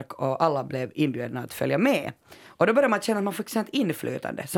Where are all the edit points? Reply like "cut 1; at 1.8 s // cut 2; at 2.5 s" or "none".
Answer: cut 1; at 2.4 s